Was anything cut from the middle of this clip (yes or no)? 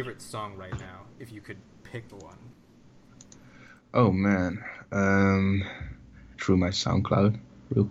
yes